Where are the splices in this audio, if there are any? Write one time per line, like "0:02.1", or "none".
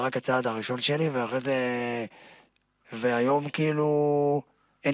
0:02.8